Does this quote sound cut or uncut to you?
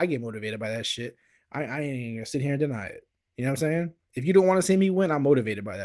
uncut